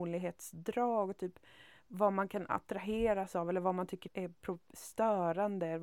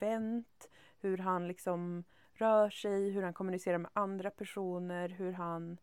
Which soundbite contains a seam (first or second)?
first